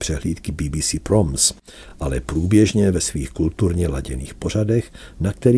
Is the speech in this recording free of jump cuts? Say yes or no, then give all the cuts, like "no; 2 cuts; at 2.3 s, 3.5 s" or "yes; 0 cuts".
yes; 0 cuts